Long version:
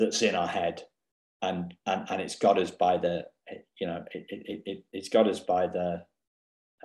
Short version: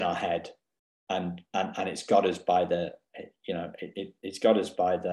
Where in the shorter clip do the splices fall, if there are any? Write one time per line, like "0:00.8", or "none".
0:03.9